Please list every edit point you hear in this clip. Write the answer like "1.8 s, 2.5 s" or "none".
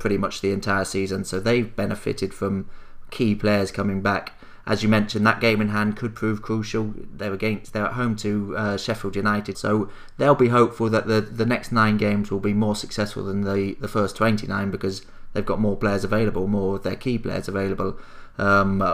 9.5 s